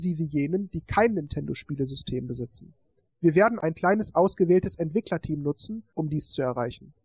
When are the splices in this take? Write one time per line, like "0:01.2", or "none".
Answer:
0:03.1